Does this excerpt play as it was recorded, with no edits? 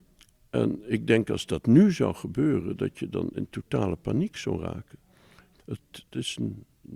no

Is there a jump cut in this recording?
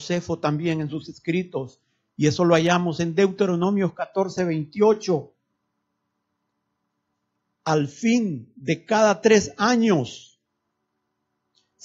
no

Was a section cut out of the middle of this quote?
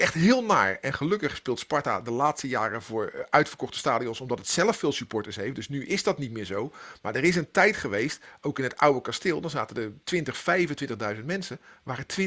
no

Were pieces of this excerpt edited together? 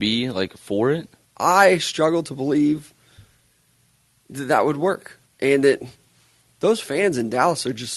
yes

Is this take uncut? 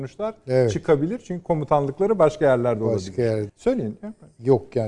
no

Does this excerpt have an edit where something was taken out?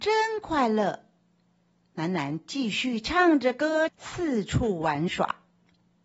yes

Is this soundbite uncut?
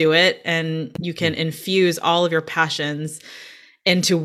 yes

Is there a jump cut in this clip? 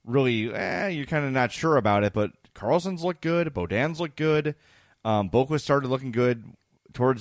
no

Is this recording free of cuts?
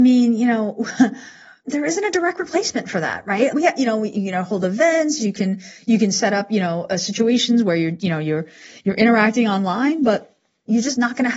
no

